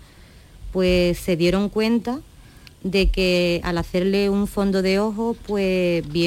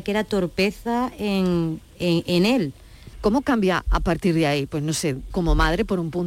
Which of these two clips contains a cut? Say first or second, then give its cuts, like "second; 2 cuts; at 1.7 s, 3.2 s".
second; 2 cuts; at 3.1 s, 5.3 s